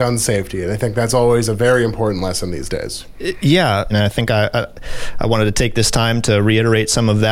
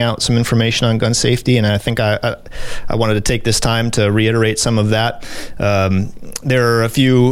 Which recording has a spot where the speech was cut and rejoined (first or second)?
first